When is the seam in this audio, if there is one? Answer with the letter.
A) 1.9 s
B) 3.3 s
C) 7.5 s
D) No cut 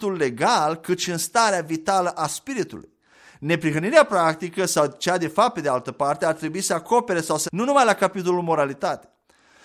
C